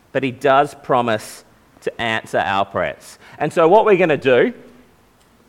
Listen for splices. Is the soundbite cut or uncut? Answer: uncut